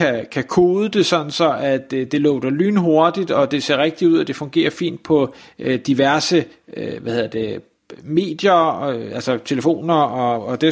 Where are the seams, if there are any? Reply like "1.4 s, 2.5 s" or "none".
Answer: none